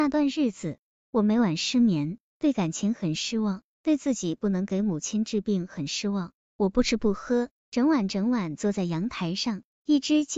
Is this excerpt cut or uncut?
uncut